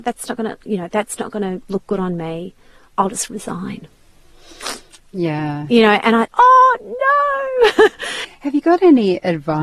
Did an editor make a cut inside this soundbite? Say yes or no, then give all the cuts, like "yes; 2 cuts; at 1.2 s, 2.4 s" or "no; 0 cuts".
yes; 2 cuts; at 6.3 s, 8.2 s